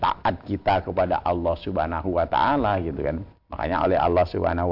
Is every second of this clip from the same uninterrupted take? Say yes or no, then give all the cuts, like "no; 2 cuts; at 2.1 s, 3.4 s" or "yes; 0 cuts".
no; 1 cut; at 3.4 s